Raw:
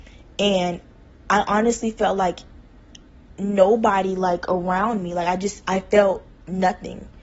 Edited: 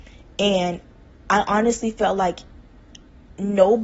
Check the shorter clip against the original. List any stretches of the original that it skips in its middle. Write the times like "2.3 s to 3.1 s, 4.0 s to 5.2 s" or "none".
none